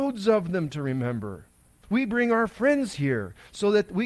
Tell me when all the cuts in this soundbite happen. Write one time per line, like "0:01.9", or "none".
0:01.8